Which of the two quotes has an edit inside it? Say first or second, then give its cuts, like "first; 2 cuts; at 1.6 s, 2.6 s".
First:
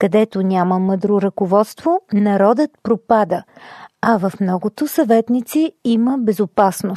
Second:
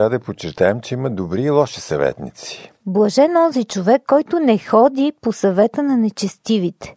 second; 1 cut; at 2.8 s